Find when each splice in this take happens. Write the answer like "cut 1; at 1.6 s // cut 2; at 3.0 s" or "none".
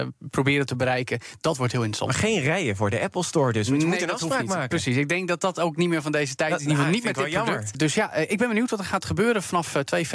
cut 1; at 7.7 s